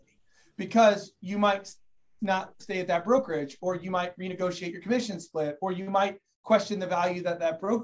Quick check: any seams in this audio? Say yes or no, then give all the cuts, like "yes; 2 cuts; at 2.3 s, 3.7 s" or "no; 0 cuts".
no; 0 cuts